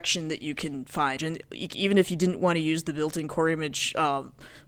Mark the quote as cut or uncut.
cut